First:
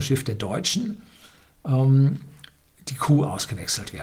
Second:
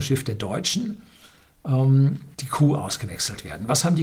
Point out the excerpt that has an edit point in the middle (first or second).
second